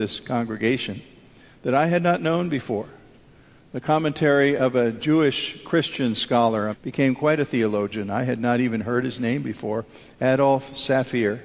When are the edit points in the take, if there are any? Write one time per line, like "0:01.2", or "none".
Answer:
0:06.7